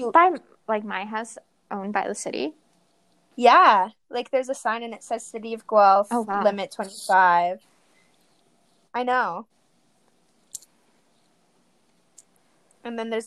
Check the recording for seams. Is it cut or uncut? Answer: uncut